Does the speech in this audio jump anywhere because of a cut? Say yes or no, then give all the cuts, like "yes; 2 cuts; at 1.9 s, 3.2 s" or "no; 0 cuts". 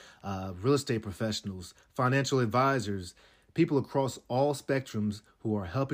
no; 0 cuts